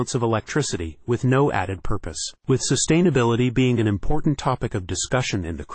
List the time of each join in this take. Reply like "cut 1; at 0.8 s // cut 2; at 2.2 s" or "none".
none